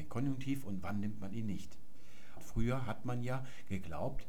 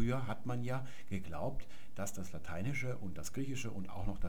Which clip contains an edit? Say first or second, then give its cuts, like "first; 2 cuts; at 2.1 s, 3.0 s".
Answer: first; 1 cut; at 2.4 s